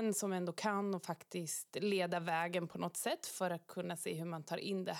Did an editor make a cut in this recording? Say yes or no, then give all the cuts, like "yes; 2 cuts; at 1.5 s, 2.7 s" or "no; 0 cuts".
no; 0 cuts